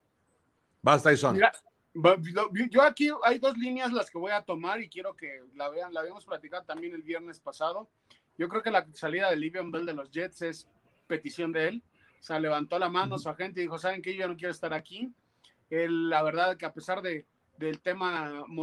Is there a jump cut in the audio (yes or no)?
no